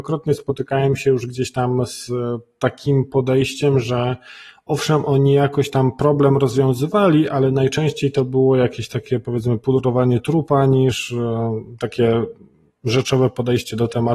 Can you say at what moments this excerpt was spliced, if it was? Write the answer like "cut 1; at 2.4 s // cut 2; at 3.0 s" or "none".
none